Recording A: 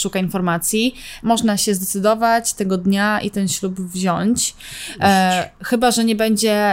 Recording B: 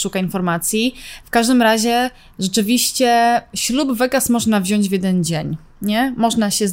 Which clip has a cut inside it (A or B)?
A